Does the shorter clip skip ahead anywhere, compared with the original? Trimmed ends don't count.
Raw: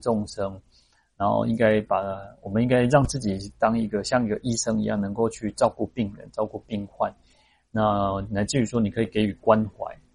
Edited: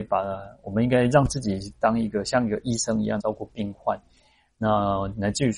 yes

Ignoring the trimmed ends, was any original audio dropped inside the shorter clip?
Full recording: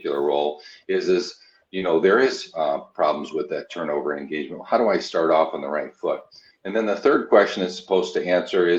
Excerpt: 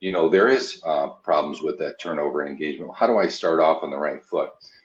no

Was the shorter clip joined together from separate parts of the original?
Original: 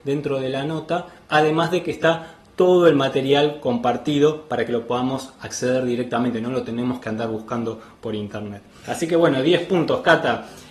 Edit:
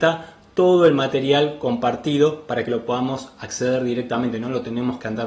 no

